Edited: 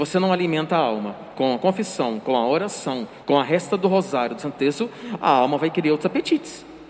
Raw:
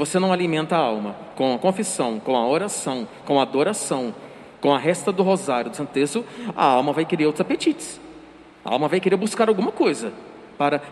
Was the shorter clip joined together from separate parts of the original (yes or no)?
yes